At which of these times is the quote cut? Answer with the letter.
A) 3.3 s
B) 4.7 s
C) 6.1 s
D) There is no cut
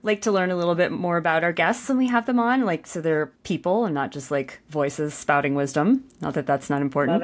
A